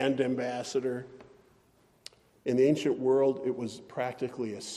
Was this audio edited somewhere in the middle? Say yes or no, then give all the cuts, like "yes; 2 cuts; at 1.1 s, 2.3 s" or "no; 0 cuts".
no; 0 cuts